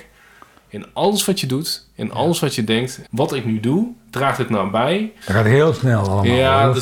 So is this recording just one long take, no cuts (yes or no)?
no